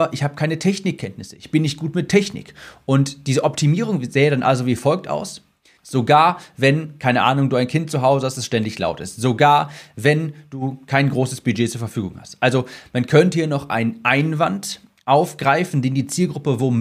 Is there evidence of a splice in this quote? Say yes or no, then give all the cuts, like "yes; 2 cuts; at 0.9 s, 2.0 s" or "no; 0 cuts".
yes; 1 cut; at 5.8 s